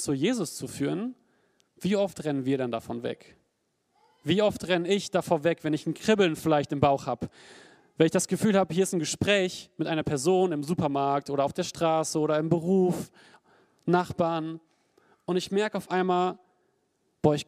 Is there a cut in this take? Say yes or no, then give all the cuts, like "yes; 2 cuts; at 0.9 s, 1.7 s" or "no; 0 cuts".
no; 0 cuts